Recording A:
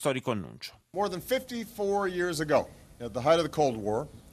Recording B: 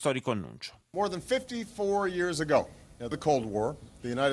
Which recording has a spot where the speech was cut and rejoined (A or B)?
B